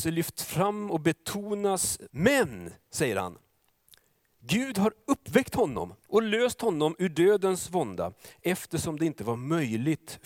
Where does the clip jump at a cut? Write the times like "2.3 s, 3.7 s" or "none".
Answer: 2.1 s, 6.0 s